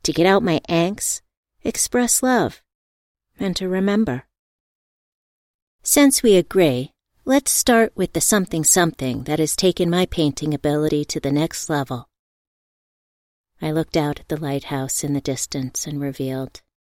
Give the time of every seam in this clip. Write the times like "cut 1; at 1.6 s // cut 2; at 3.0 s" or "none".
none